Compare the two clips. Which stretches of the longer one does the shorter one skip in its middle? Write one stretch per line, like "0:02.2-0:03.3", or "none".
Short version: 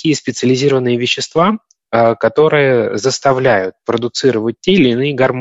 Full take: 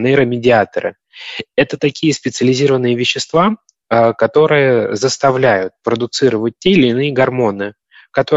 none